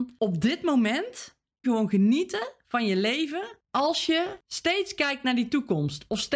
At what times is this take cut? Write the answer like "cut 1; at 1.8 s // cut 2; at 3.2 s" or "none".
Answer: cut 1; at 1.6 s